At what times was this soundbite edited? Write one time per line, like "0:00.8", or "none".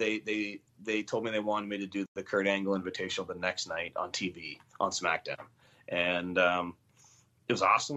none